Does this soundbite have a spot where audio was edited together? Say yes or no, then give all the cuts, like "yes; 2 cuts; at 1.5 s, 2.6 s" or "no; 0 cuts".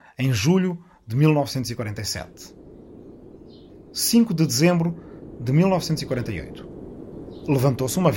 no; 0 cuts